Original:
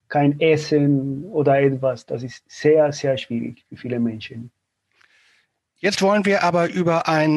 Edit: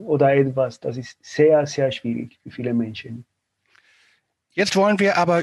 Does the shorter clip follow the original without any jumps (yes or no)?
yes